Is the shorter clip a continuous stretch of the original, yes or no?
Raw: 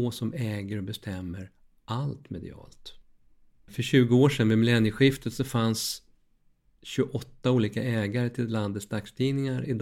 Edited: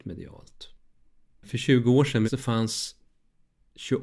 no